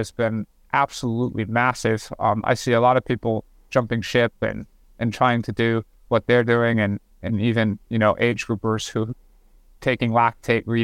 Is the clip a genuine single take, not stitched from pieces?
yes; 0 cuts

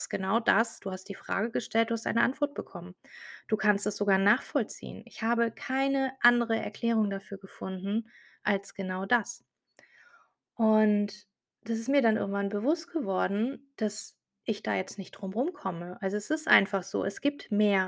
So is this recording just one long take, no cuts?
yes; 0 cuts

